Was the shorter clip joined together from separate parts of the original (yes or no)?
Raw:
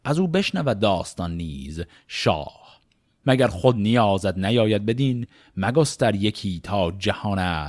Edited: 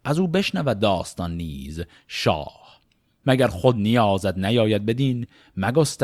no